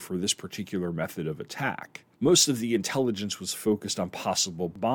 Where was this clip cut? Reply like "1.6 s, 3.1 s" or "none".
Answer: 2.1 s

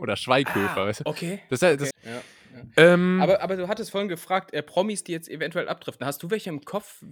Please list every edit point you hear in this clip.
1.9 s

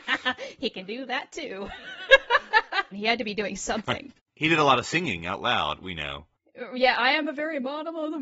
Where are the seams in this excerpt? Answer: 2.9 s, 5.8 s

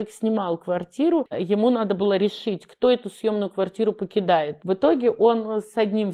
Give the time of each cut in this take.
1.3 s, 4.6 s

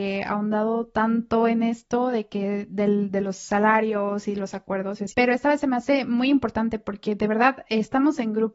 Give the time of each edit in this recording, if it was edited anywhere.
5.1 s

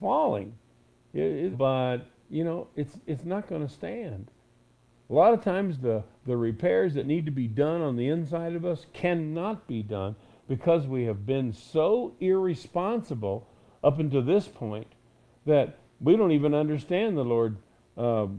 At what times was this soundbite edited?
1.5 s, 5.0 s

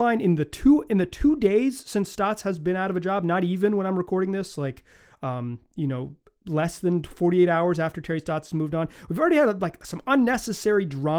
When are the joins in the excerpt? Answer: none

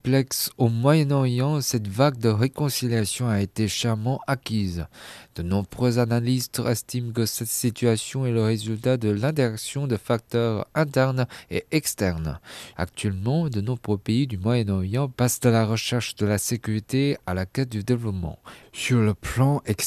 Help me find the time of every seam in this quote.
12.7 s, 18.6 s

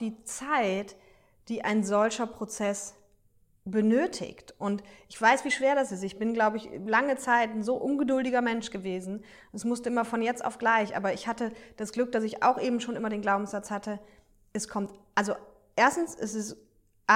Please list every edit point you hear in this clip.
none

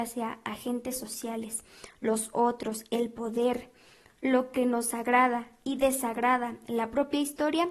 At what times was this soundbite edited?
none

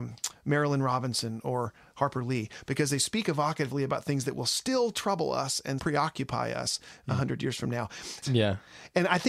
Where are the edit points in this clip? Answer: 5.8 s, 8.2 s

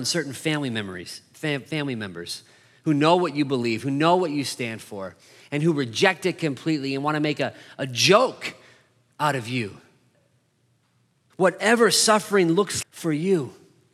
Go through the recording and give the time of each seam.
11.3 s, 12.8 s

